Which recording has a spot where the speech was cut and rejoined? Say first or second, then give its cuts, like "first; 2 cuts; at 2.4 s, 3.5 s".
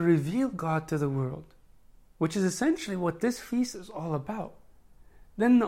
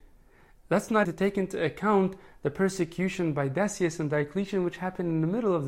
second; 1 cut; at 1.0 s